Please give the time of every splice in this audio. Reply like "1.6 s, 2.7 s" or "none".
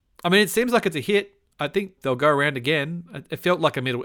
2.0 s